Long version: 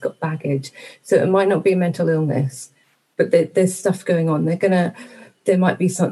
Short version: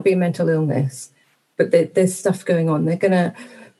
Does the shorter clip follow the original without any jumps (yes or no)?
yes